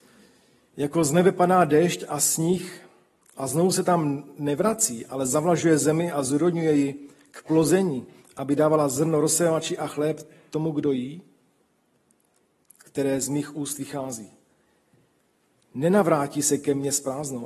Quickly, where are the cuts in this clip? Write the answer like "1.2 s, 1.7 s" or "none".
12.7 s